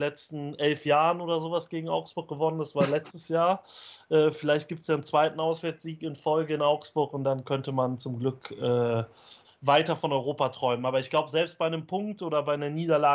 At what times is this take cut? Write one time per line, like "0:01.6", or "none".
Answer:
0:09.4